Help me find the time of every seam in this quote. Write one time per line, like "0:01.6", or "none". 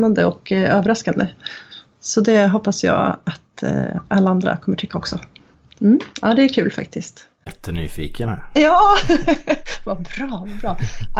0:06.1
0:07.5

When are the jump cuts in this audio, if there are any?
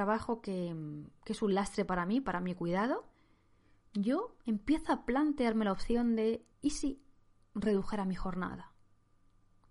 0:06.5

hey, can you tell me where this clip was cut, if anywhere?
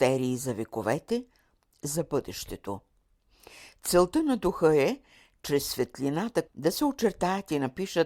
0:06.5

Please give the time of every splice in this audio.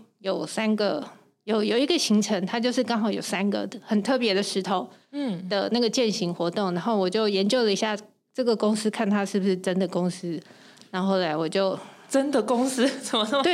none

